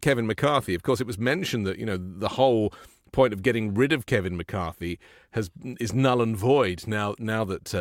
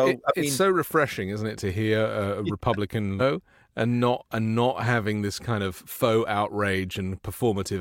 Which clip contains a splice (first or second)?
second